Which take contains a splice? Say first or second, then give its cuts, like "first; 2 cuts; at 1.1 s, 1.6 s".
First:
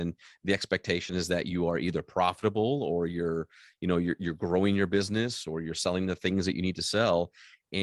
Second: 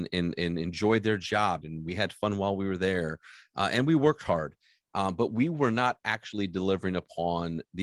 second; 1 cut; at 1.6 s